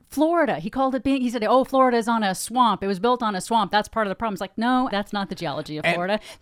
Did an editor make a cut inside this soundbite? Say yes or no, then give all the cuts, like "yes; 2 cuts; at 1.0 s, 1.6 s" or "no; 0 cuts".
yes; 1 cut; at 4.9 s